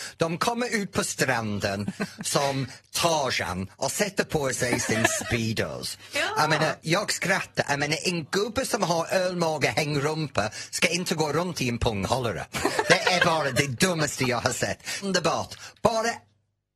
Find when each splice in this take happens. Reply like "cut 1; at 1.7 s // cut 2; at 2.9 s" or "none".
cut 1; at 6.8 s // cut 2; at 15.0 s

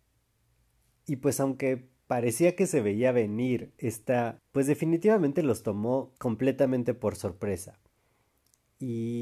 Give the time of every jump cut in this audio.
cut 1; at 4.4 s // cut 2; at 6.2 s

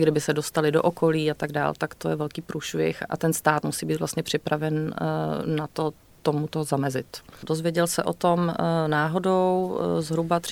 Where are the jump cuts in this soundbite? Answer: cut 1; at 3.1 s // cut 2; at 7.4 s

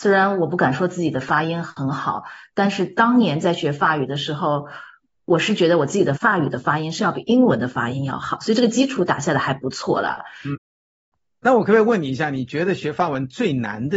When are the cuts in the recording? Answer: cut 1; at 6.2 s // cut 2; at 10.5 s

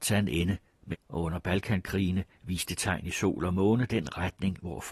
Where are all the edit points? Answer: cut 1; at 0.9 s

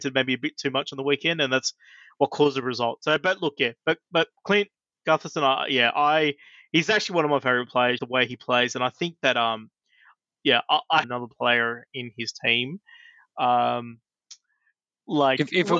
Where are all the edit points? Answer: cut 1; at 8.0 s // cut 2; at 11.0 s

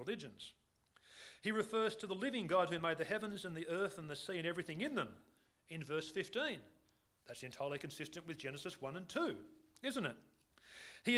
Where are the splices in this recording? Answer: none

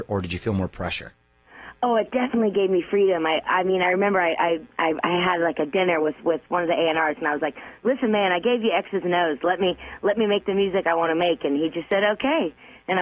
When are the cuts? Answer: none

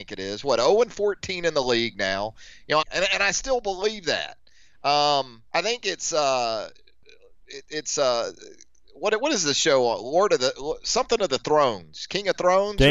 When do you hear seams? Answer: cut 1; at 2.8 s // cut 2; at 5.5 s

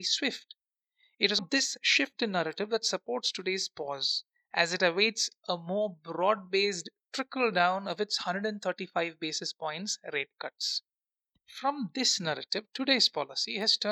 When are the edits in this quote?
cut 1; at 1.4 s // cut 2; at 11.3 s

